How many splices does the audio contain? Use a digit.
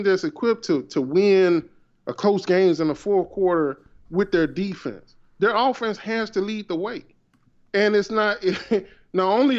0